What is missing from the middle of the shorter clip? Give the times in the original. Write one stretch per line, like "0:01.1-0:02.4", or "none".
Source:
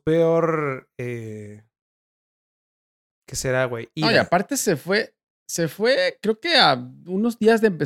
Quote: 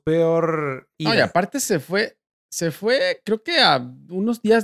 0:00.9-0:03.9